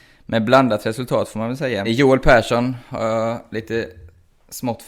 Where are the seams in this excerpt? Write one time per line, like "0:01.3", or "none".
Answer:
0:01.8